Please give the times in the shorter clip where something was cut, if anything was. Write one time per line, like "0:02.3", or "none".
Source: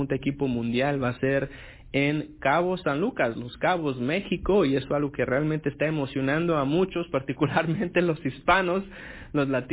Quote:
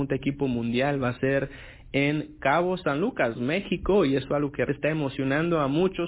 0:03.3
0:04.7

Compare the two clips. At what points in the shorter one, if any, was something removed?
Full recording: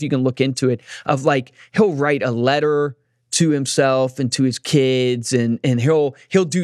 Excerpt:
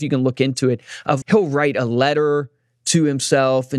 0:01.2

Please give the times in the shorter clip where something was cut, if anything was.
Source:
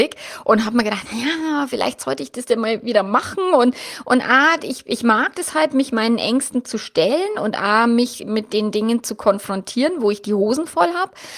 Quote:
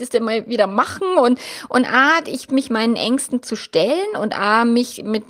0:02.5

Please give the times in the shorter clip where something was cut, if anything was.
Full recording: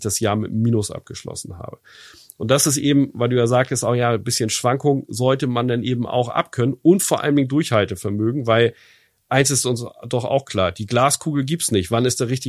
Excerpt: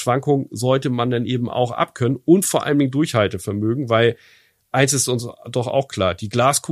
none

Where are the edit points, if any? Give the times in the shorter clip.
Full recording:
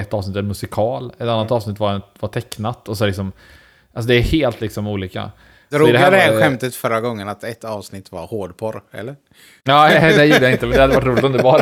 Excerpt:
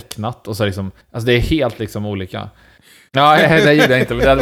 0:01.0
0:02.8

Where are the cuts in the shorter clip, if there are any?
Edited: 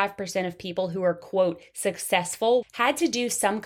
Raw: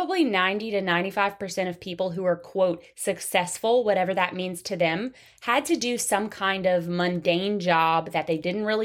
0:02.6

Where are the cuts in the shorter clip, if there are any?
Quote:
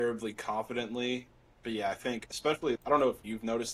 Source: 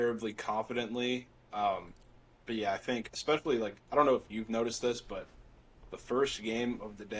0:01.4
0:02.8

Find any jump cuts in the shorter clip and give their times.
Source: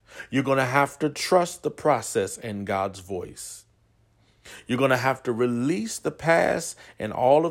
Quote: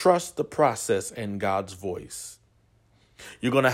none

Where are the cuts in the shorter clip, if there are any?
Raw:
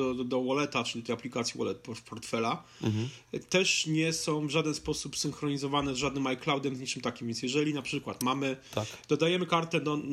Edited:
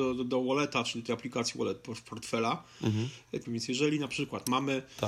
0:03.4

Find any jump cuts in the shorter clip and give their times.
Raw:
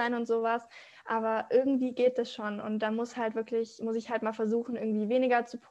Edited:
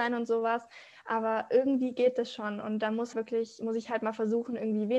0:03.1

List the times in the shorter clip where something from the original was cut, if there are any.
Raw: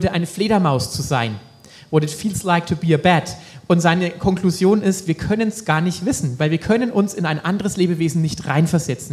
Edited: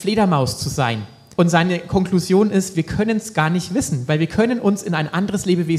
0:01.3

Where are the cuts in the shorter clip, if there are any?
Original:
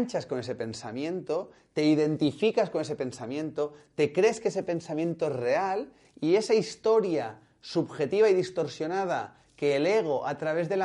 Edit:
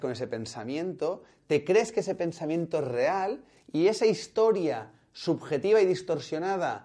0:01.4

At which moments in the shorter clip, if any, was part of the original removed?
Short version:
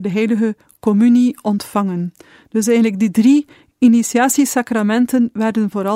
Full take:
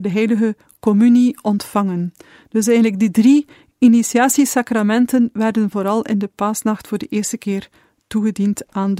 none

